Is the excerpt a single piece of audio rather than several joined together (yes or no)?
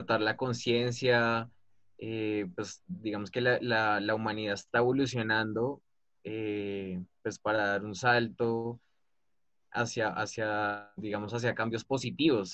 yes